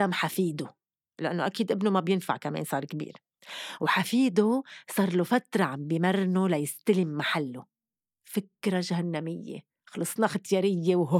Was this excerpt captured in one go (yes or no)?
yes